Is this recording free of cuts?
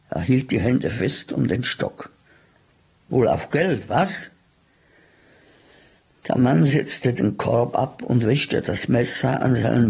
yes; 0 cuts

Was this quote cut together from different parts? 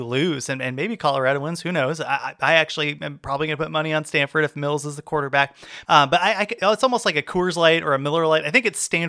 yes; 1 cut; at 5.8 s

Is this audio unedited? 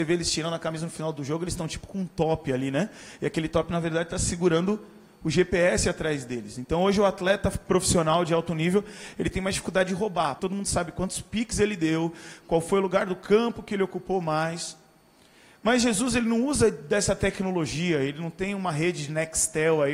no; 2 cuts; at 10.4 s, 12.4 s

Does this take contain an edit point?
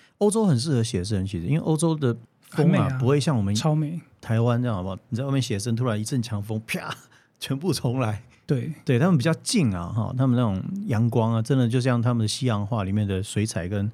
no; 0 cuts

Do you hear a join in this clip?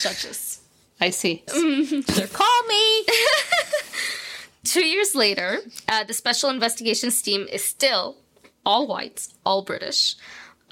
yes; 1 cut; at 1.5 s

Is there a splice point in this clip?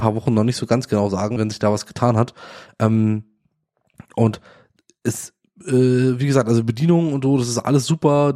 yes; 1 cut; at 1.4 s

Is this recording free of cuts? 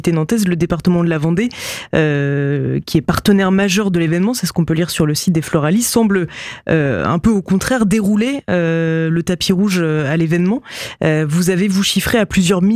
yes; 0 cuts

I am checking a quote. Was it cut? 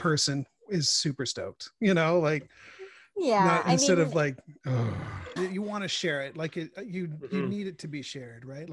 yes; 1 cut; at 5.4 s

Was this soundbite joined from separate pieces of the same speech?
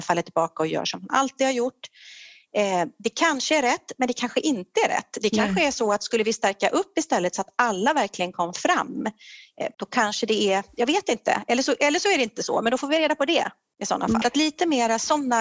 yes; 2 cuts; at 9.7 s, 14.2 s

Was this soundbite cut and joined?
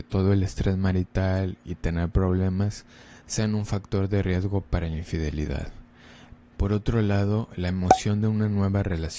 yes; 1 cut; at 6.4 s

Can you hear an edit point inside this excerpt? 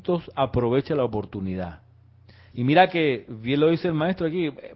yes; 1 cut; at 2.5 s

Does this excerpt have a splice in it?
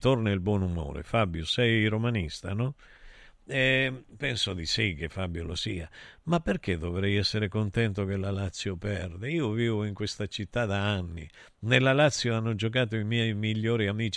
no; 0 cuts

